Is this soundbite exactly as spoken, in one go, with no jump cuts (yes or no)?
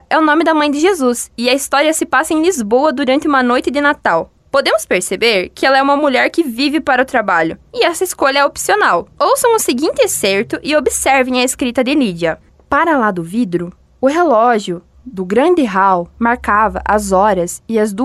yes